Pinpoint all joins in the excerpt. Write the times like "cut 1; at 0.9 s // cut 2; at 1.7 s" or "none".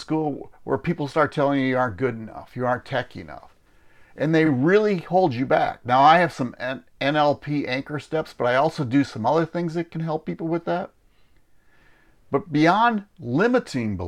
none